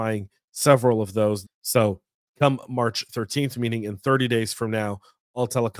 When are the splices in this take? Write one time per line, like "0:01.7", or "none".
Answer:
0:01.4